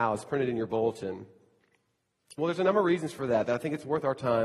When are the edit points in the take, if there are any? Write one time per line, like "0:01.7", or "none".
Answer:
0:02.4